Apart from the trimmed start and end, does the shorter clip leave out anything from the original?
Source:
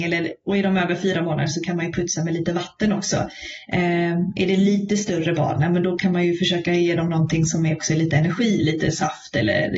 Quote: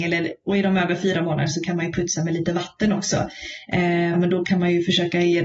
yes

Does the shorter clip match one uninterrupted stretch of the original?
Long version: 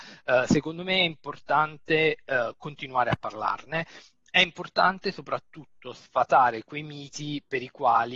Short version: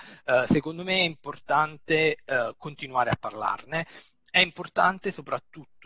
yes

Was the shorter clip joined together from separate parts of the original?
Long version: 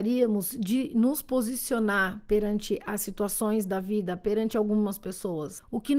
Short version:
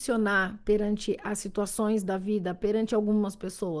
no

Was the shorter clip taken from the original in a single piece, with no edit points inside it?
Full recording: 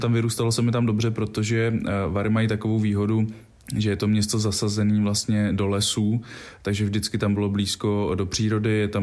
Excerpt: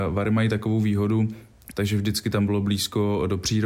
no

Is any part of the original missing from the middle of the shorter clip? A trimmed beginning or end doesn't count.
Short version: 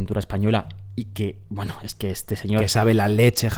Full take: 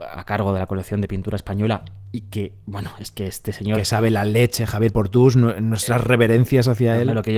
no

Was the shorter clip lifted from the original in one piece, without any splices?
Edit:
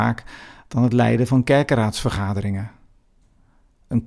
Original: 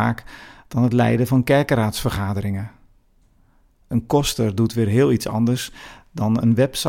yes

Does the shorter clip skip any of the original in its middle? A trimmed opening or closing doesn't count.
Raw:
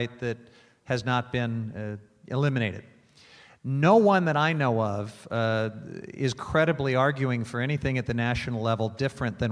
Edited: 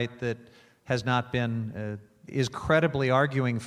yes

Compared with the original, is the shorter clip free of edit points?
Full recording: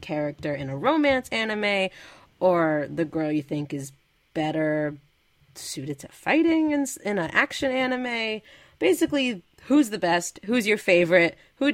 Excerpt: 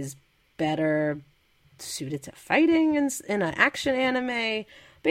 yes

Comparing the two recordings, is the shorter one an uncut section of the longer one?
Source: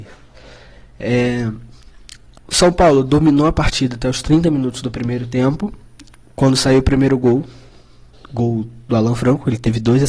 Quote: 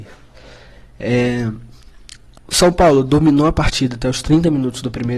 yes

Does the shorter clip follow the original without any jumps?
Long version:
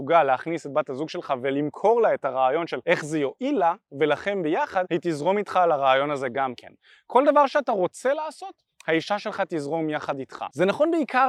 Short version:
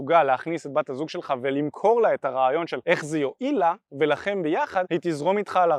yes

